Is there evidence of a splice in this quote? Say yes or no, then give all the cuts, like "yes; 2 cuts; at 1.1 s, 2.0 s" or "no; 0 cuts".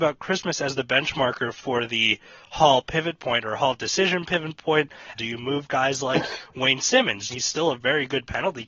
yes; 2 cuts; at 5.1 s, 7.3 s